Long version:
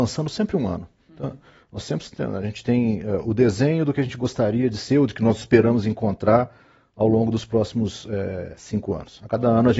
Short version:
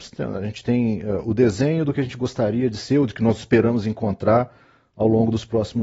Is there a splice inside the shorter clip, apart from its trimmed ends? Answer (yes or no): no